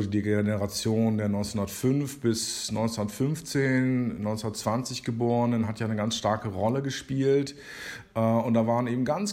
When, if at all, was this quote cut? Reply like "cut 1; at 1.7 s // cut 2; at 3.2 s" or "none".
none